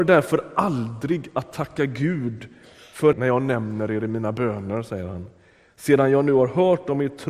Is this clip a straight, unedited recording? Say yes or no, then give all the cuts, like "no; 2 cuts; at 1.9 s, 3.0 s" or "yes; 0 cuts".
no; 1 cut; at 3.1 s